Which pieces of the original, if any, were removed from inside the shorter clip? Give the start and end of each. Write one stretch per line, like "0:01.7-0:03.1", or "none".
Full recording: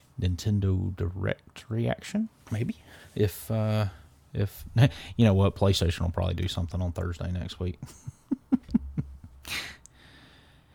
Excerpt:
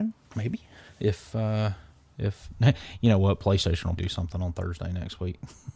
0:06.1-0:06.4